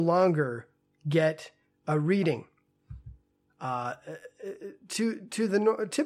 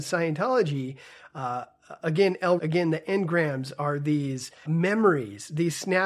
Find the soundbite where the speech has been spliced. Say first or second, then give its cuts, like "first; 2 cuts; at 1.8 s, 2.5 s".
second; 2 cuts; at 2.6 s, 4.6 s